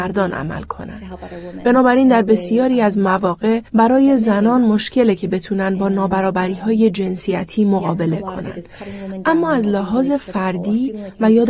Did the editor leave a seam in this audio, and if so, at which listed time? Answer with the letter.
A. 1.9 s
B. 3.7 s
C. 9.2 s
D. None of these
B